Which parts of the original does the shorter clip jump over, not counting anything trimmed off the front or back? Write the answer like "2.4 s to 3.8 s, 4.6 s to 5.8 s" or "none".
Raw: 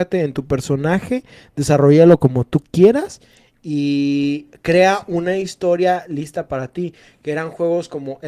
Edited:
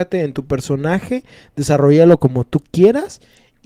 none